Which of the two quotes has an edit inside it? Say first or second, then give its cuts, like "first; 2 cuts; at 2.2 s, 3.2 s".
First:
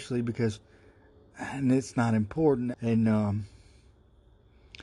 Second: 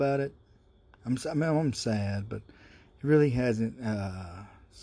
first; 1 cut; at 2.7 s